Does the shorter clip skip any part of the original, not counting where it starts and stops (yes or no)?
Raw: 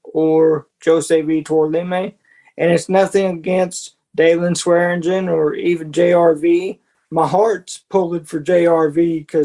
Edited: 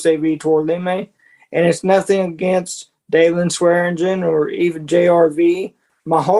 no